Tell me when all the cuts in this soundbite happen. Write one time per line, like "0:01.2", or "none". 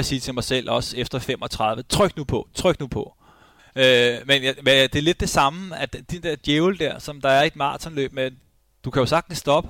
0:03.6